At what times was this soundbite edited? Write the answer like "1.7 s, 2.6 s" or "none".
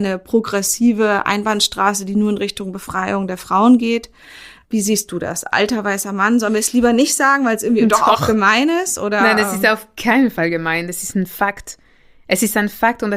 none